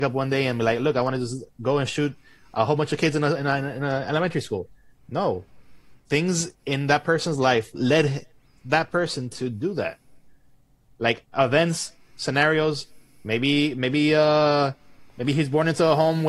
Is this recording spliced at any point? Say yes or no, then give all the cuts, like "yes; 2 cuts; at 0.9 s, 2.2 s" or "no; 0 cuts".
no; 0 cuts